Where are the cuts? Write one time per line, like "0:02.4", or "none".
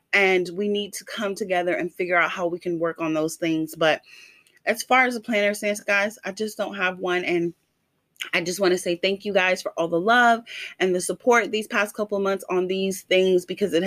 none